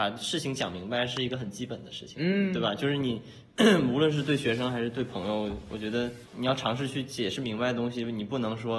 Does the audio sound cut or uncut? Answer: cut